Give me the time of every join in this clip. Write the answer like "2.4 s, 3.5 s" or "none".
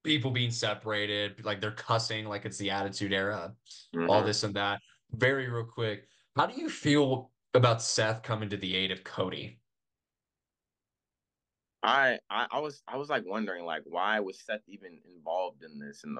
none